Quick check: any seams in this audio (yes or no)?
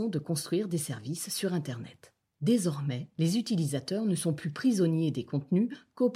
no